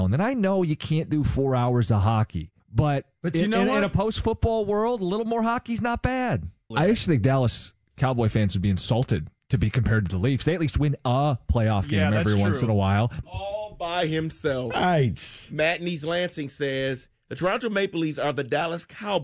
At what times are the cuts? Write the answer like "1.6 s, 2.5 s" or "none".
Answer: 2.6 s, 6.7 s, 13.2 s